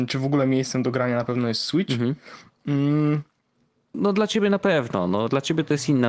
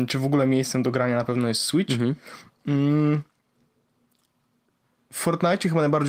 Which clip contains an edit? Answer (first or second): first